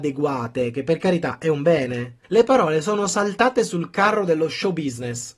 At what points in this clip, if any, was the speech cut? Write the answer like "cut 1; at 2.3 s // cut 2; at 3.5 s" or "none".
cut 1; at 2.2 s